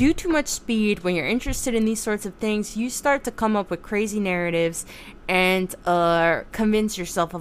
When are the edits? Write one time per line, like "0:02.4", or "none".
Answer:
none